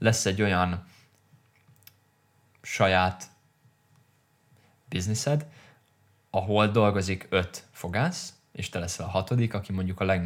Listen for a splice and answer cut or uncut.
uncut